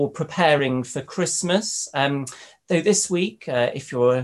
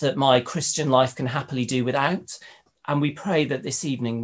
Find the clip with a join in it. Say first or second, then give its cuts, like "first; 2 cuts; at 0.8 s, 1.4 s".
second; 1 cut; at 2.7 s